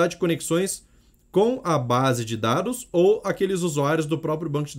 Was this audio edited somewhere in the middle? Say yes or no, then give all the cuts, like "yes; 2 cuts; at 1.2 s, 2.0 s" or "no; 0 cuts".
no; 0 cuts